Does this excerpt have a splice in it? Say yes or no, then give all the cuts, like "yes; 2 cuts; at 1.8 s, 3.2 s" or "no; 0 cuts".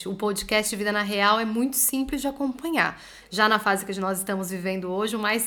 yes; 1 cut; at 3.2 s